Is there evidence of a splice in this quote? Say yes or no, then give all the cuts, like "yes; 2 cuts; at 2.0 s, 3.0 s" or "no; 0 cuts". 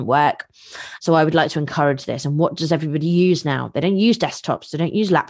yes; 1 cut; at 1.0 s